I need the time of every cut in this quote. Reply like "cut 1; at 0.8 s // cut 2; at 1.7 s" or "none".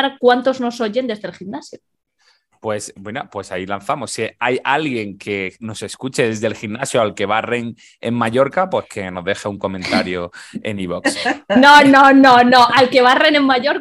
none